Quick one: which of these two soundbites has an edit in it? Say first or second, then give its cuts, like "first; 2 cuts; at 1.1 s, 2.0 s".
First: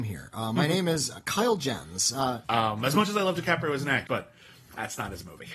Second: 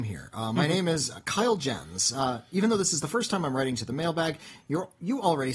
first; 2 cuts; at 2.4 s, 4.1 s